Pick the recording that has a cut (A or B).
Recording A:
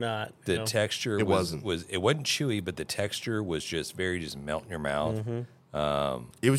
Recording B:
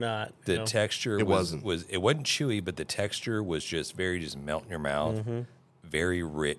B